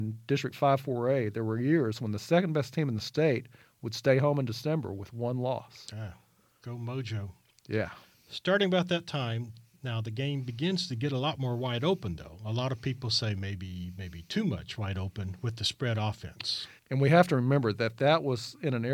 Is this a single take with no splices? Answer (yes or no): no